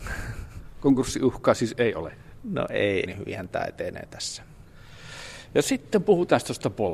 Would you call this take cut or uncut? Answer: cut